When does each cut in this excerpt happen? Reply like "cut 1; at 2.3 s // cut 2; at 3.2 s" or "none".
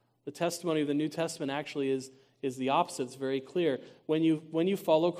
none